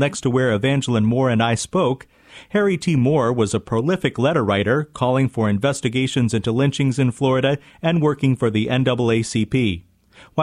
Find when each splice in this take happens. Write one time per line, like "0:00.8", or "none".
none